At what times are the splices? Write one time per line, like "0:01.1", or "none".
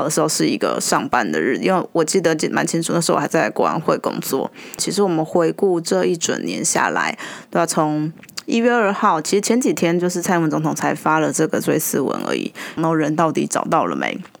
0:04.8
0:12.8